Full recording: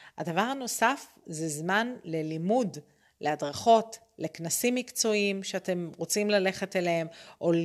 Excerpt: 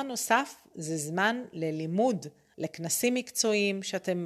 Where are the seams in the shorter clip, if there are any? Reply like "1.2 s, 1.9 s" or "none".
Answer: 2.5 s